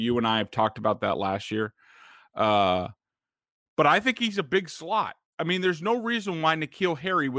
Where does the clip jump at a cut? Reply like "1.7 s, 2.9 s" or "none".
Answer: none